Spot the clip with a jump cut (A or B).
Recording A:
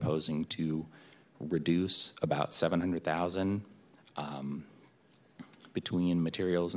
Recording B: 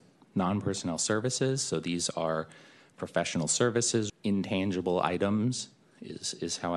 B